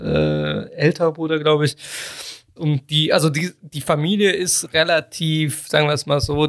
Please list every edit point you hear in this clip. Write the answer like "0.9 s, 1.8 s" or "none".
2.6 s